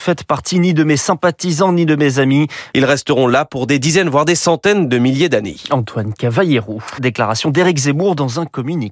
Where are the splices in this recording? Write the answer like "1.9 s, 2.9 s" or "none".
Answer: 2.7 s, 7.0 s